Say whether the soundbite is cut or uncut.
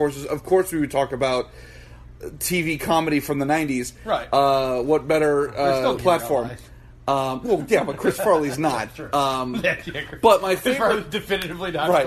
cut